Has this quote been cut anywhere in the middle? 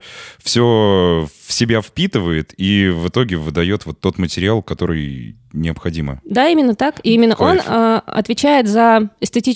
no; 0 cuts

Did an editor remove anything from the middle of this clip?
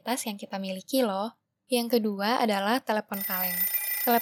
no; 0 cuts

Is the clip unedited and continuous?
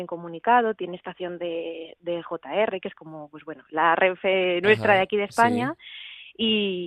yes; 0 cuts

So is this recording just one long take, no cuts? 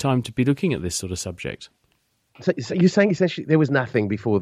yes; 0 cuts

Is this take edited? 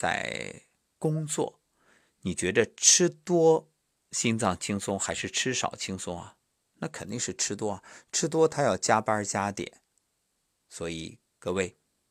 no; 0 cuts

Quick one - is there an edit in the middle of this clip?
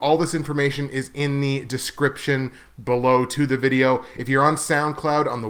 no; 0 cuts

